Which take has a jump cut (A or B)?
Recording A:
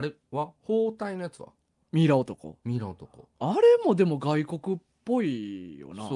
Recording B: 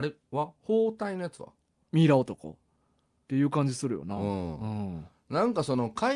B